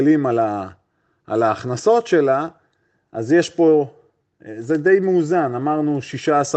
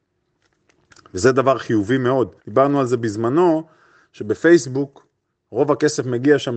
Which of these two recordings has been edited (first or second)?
second